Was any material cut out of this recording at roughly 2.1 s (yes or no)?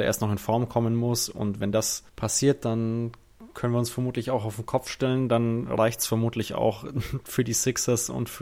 yes